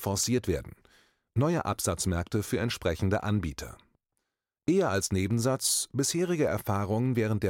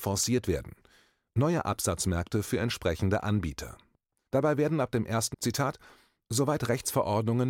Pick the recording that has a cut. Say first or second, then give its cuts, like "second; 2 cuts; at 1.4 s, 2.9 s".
second; 2 cuts; at 4.3 s, 5.3 s